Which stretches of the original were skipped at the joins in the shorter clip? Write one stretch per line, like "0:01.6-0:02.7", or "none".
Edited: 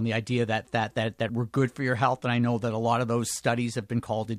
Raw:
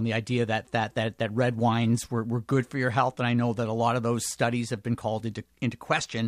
0:01.3-0:02.2